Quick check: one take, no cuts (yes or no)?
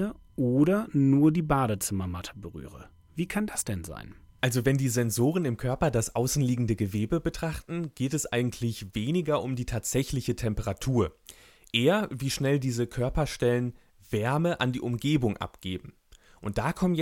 yes